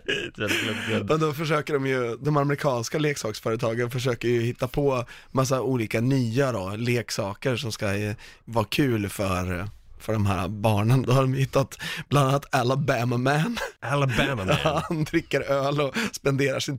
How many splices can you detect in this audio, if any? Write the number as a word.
one